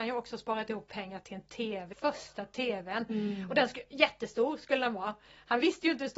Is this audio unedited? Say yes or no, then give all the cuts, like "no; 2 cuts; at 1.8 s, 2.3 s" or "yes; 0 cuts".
no; 1 cut; at 1.9 s